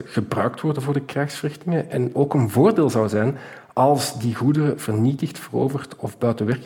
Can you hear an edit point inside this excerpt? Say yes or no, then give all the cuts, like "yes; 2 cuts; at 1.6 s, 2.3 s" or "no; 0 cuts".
yes; 1 cut; at 2.1 s